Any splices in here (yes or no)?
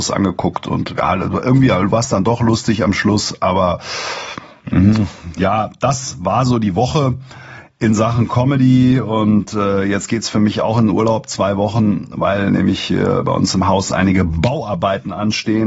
yes